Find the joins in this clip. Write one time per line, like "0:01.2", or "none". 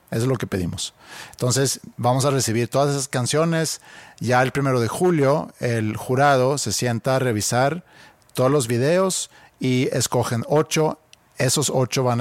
none